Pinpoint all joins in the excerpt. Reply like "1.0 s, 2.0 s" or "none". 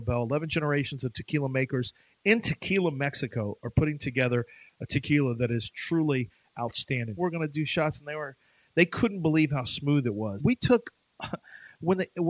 7.2 s, 10.4 s